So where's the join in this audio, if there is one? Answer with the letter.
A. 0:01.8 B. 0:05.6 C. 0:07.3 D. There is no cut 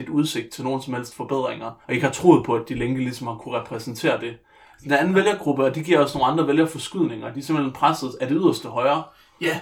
A